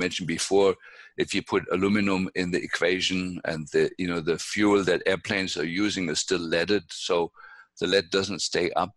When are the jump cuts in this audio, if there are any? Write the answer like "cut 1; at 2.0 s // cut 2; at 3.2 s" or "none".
none